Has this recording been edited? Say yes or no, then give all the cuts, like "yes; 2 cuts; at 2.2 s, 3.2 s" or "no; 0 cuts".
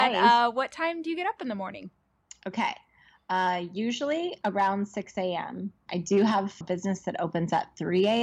yes; 1 cut; at 6.6 s